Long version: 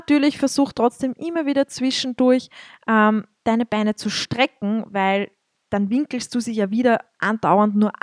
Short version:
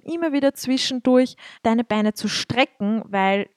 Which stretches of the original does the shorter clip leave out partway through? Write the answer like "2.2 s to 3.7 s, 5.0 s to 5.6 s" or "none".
2.7 s to 3.4 s

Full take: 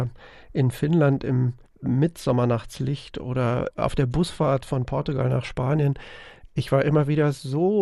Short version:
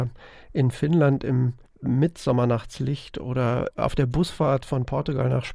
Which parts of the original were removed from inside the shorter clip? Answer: none

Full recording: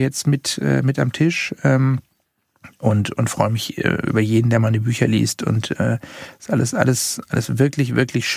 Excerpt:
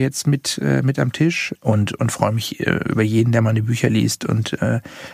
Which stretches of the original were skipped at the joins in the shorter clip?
1.6 s to 2.7 s

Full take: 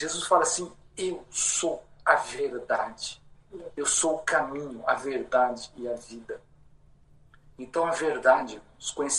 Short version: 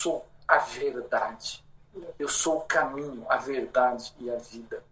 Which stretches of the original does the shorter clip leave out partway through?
none

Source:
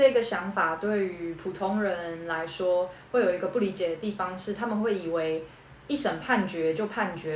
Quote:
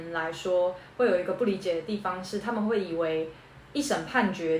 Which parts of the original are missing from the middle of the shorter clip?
none

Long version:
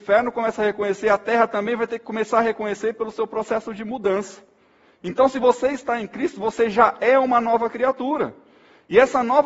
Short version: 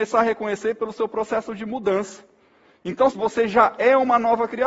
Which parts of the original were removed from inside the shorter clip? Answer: 5.3 s to 6.3 s

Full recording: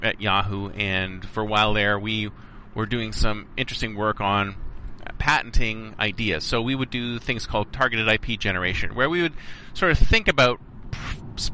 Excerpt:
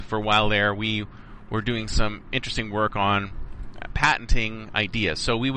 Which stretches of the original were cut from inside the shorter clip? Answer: none

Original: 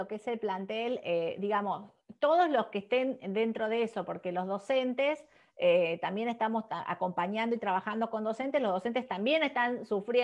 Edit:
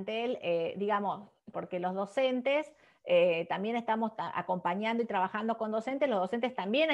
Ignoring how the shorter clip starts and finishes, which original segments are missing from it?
2.1 s to 4.1 s

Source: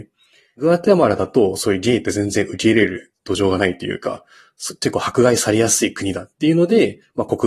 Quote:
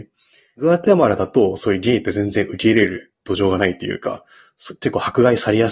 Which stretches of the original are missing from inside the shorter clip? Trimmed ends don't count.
none

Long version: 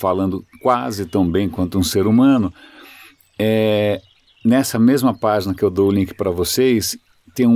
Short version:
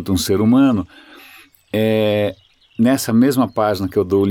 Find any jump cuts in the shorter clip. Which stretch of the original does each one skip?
none

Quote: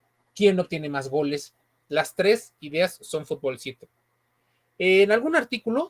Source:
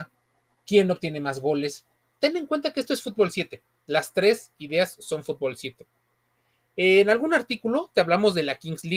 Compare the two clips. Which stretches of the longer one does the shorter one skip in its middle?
2.1 s to 3.8 s

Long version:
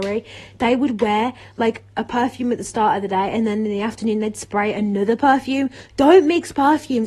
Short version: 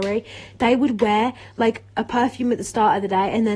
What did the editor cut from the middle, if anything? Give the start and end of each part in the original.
none

